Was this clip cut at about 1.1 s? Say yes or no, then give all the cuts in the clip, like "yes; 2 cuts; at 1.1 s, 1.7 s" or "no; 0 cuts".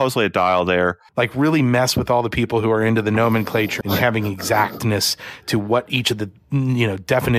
yes; 2 cuts; at 1.1 s, 3.8 s